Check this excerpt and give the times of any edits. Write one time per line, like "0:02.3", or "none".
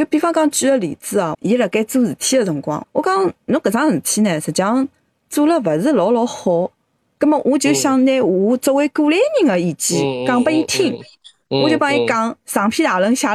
0:01.3
0:02.8